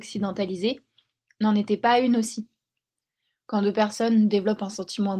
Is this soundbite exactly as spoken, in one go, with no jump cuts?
yes; 0 cuts

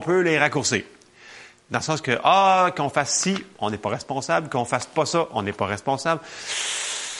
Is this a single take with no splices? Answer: no; 1 cut; at 1.6 s

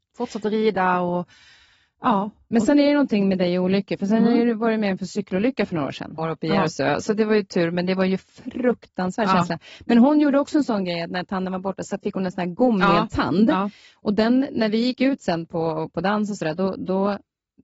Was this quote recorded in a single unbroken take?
no; 1 cut; at 6.2 s

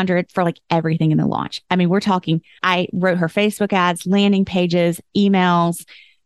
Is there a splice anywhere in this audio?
no; 0 cuts

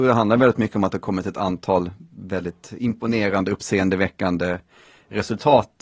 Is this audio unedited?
yes; 0 cuts

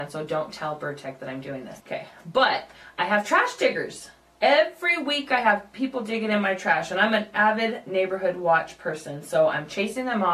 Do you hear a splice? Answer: yes; 1 cut; at 1.8 s

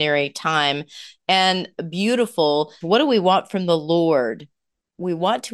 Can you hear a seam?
yes; 1 cut; at 2.8 s

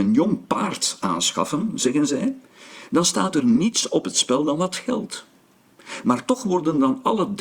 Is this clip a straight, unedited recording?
yes; 0 cuts

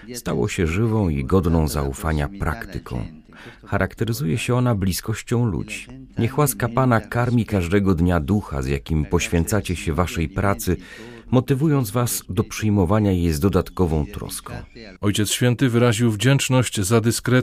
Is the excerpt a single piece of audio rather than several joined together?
no; 2 cuts; at 6.1 s, 15.0 s

